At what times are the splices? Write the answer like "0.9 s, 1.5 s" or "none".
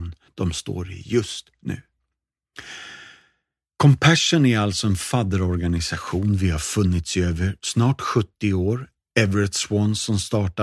none